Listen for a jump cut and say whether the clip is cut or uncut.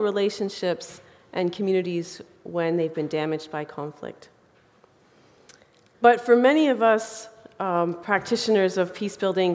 cut